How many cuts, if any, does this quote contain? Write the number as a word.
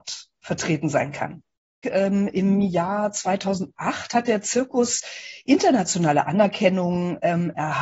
one